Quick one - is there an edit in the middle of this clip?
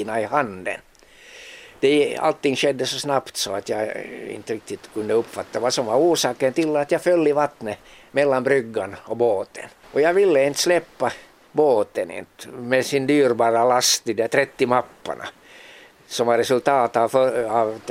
yes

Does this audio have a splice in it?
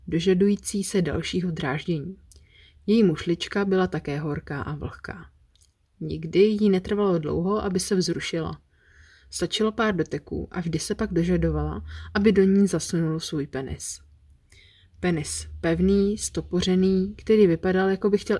no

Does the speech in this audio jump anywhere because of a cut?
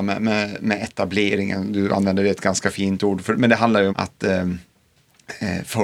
yes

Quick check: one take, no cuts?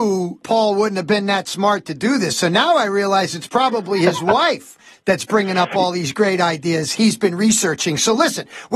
yes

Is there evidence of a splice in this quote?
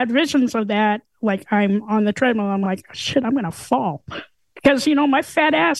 no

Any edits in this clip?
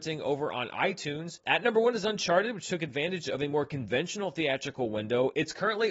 no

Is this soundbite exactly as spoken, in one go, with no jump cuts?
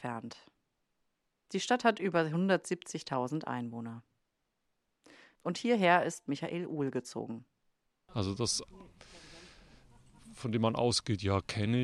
no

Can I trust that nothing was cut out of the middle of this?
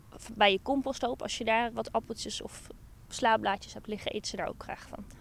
no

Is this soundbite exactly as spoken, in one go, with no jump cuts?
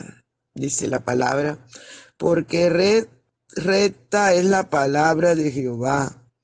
yes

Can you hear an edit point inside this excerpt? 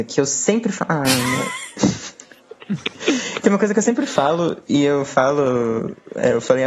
no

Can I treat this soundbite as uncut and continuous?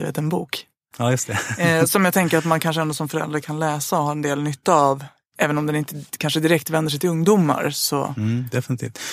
yes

